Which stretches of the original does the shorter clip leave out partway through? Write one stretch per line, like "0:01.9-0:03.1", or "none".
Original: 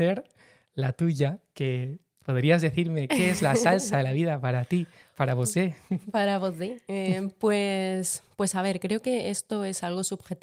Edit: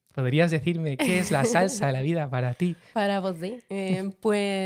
0:05.0-0:06.1